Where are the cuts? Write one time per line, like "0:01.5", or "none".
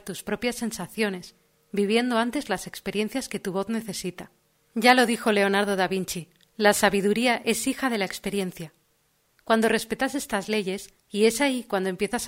0:09.3
0:11.0